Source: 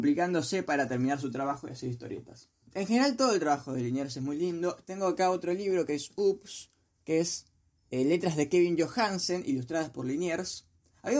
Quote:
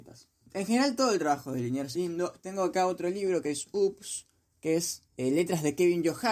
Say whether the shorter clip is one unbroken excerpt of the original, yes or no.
no